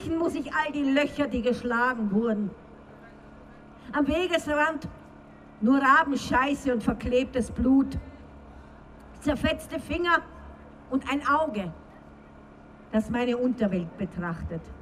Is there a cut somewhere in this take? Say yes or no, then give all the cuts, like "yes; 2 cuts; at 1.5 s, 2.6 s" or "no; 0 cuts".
no; 0 cuts